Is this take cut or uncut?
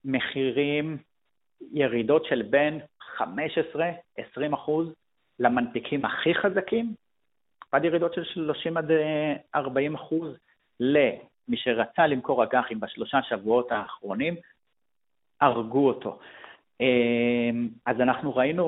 cut